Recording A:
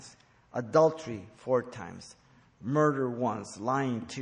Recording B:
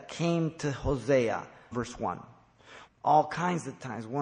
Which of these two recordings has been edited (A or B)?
B